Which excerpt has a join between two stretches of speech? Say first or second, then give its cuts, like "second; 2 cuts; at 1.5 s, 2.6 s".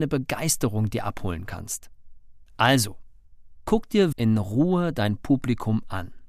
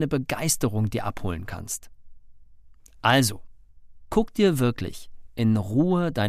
first; 2 cuts; at 2.5 s, 4.1 s